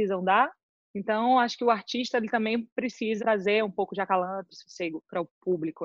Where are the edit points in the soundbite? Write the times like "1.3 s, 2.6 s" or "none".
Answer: 3.2 s, 4.5 s